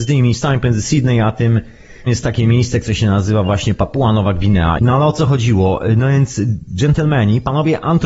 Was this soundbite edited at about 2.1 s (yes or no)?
yes